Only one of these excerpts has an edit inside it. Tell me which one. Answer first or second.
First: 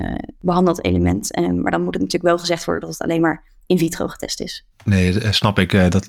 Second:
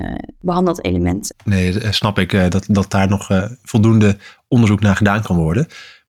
second